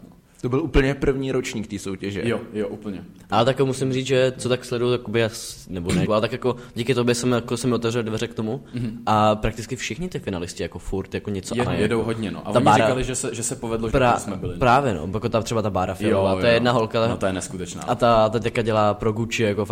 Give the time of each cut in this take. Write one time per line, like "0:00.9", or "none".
0:06.1
0:11.7
0:13.9